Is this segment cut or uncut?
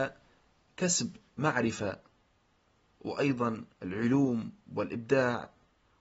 cut